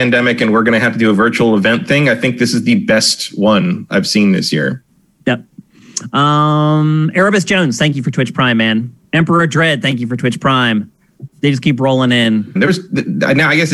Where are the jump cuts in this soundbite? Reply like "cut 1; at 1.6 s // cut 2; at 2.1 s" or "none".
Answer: cut 1; at 9.0 s // cut 2; at 11.3 s // cut 3; at 12.6 s